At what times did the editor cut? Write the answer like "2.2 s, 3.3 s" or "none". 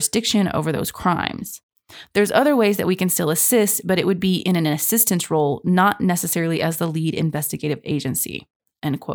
none